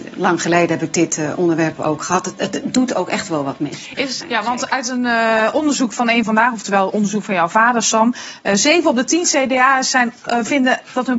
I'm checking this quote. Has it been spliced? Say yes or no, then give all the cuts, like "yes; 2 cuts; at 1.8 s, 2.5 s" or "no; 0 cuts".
yes; 1 cut; at 4.2 s